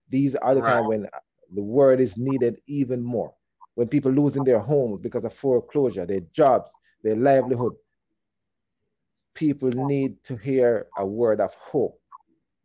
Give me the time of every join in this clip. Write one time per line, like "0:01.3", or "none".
none

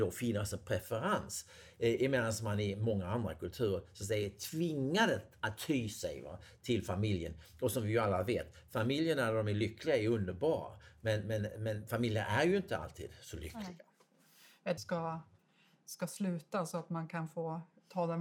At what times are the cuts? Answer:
0:14.8

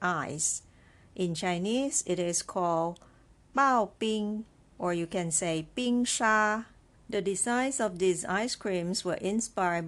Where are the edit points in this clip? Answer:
0:04.7
0:07.0

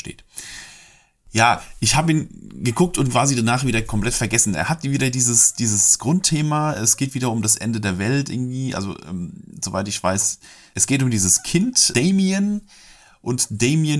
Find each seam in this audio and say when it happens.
none

